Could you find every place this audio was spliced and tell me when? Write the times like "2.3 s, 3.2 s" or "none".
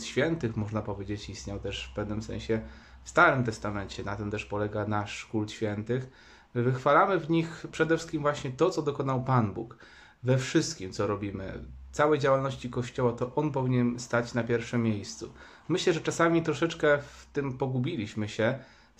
none